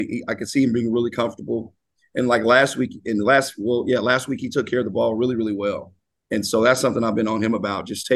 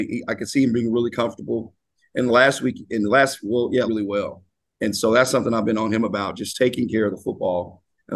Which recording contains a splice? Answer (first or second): second